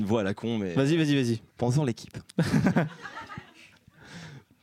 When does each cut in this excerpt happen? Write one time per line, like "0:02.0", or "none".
0:01.5